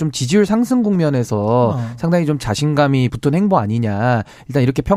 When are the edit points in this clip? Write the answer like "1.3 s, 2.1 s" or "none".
3.1 s

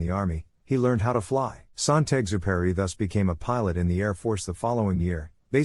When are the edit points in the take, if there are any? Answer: 1.7 s

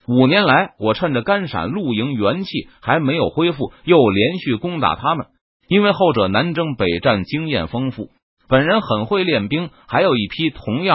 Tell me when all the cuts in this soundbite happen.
5.5 s

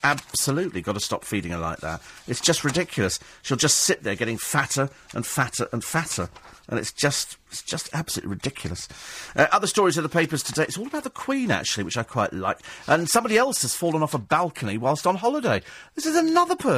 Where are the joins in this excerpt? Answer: none

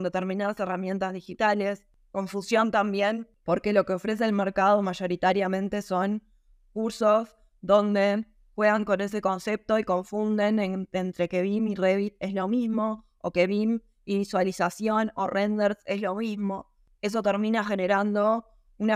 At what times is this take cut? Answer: none

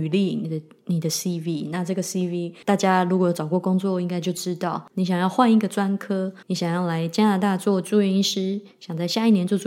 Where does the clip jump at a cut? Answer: 4.9 s, 6.4 s

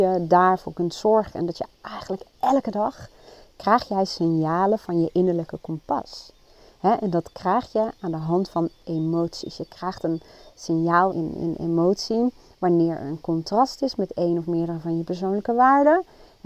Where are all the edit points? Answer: 11.1 s

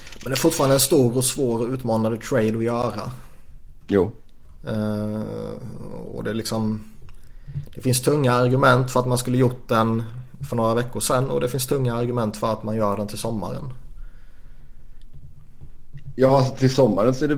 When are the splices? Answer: none

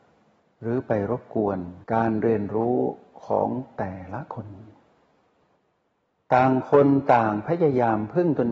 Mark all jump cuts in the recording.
1.8 s

